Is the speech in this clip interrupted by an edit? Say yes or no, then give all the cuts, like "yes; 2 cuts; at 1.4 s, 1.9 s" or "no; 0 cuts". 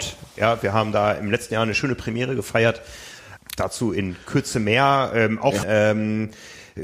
yes; 2 cuts; at 3.4 s, 5.6 s